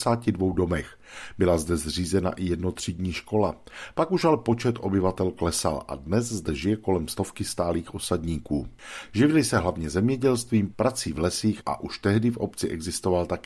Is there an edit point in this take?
yes; 2 cuts; at 9.1 s, 10.7 s

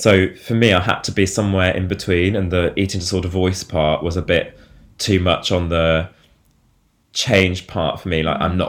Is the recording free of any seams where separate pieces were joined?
yes; 0 cuts

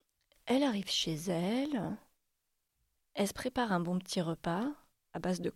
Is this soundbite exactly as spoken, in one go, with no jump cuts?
yes; 0 cuts

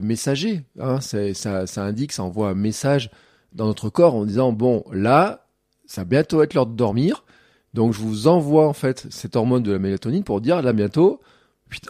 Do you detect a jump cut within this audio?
no; 0 cuts

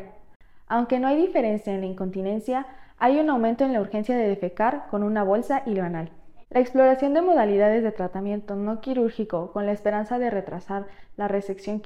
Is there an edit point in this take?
no; 0 cuts

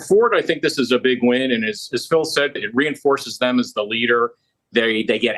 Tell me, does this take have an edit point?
yes; 1 cut; at 2.6 s

